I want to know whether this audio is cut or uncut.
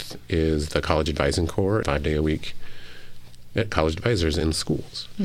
cut